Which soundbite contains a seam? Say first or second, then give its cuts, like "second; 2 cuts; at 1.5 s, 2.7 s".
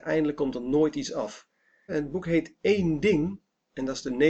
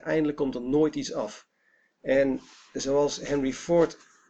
first; 1 cut; at 1.9 s